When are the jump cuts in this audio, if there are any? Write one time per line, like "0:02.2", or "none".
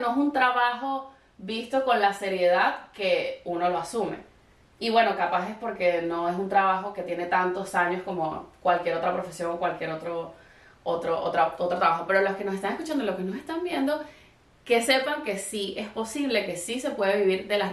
none